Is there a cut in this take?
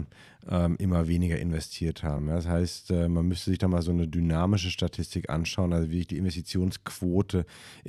no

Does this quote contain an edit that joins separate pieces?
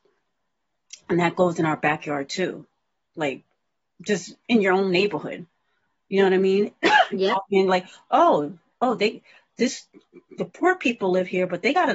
no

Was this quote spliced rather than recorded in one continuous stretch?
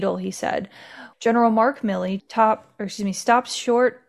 yes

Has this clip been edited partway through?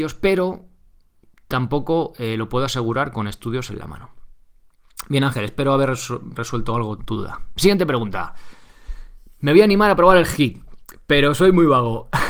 yes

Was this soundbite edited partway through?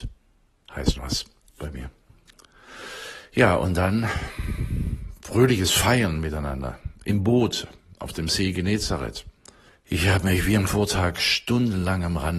yes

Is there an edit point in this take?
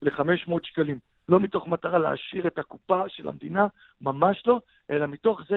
no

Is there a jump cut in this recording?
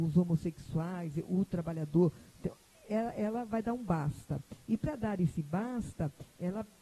no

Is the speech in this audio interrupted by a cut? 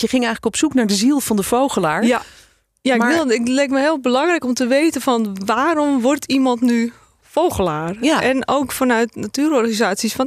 no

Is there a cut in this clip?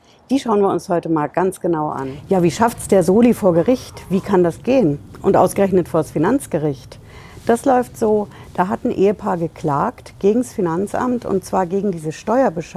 no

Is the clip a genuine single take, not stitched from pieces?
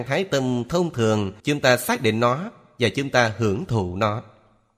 no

